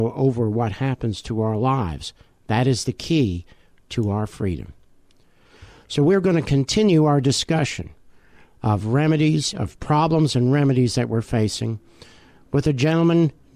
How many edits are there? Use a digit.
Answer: 0